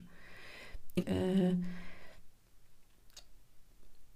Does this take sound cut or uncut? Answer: cut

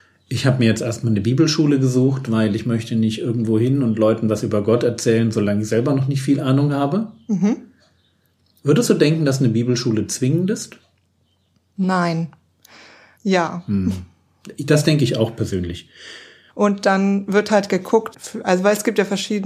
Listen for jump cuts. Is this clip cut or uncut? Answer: cut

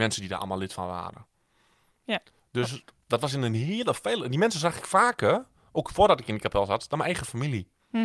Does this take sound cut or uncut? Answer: uncut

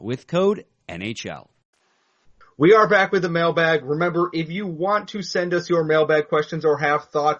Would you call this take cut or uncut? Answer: uncut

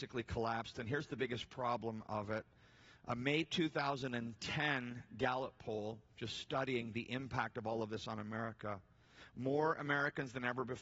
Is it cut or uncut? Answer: uncut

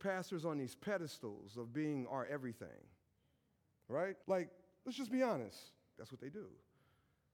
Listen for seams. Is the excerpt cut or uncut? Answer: cut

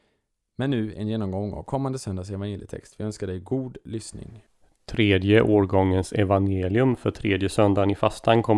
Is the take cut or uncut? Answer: uncut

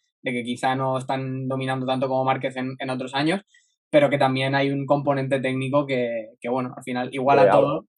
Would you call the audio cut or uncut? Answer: uncut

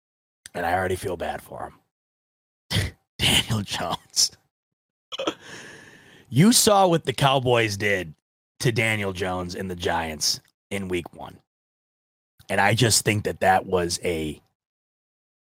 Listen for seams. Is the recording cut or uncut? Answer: uncut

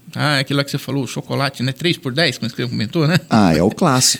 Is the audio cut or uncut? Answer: uncut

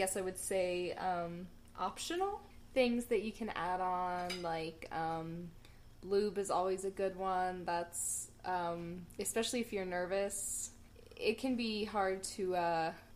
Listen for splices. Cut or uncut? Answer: uncut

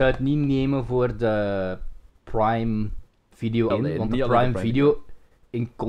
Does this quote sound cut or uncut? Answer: cut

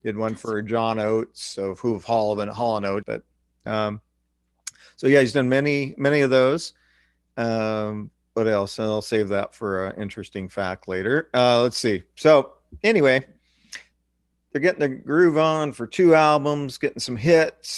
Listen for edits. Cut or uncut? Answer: cut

